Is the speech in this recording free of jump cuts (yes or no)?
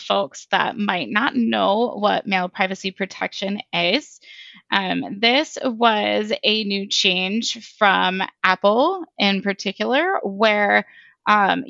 yes